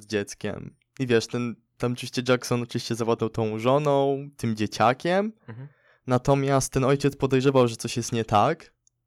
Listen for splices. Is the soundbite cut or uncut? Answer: uncut